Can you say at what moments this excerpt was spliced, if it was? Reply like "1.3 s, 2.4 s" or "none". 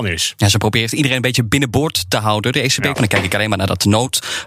2.9 s